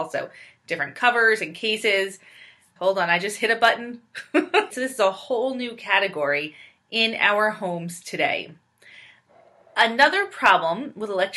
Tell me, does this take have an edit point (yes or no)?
yes